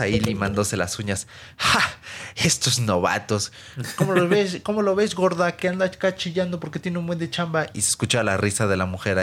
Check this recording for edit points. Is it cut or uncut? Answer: uncut